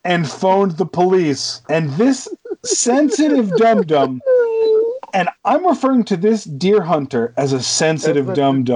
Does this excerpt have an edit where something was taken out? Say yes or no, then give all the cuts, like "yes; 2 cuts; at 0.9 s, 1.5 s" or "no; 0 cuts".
yes; 2 cuts; at 1.6 s, 5.4 s